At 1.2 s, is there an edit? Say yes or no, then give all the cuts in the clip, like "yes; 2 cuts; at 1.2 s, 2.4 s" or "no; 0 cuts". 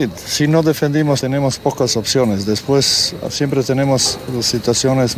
yes; 2 cuts; at 1.2 s, 3.2 s